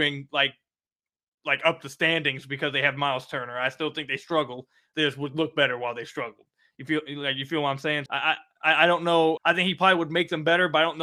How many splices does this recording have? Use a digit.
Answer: 2